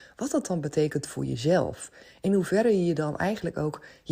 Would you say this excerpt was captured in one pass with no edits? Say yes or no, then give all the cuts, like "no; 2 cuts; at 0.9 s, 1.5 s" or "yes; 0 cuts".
yes; 0 cuts